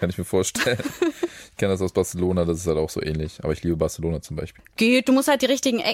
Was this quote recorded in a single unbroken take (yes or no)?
no